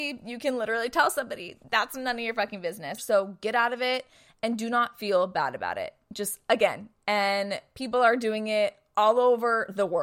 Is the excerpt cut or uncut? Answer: cut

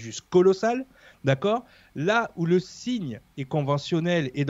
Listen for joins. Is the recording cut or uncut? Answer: uncut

